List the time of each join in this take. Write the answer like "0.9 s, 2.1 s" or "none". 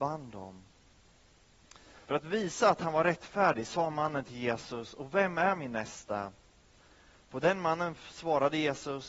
2.0 s

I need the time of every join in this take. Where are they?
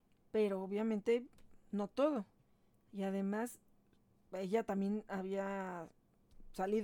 none

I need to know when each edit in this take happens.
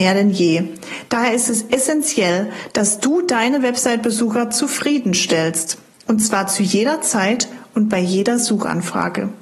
1.1 s

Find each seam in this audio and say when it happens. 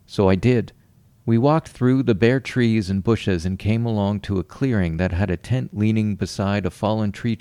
1.1 s

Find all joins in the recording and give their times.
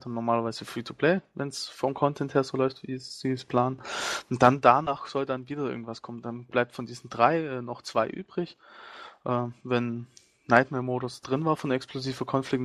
11.2 s

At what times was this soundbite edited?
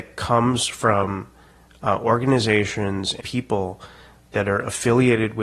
3.2 s

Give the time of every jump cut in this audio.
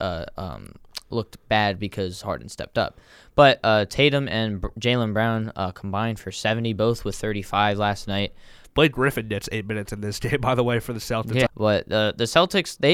8.6 s, 11.5 s

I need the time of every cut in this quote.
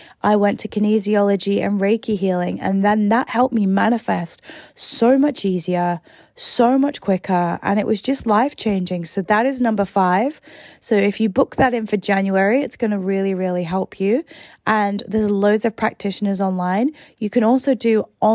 none

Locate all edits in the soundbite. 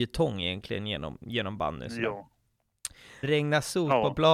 3.2 s

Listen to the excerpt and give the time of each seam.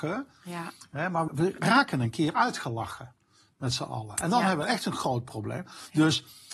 1.3 s

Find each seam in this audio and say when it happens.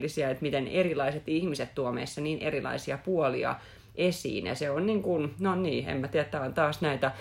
none

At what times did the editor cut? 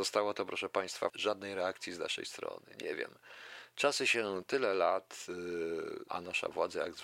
1.1 s, 6.1 s

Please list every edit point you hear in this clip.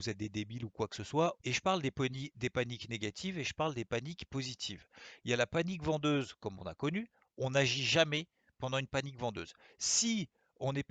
1.4 s

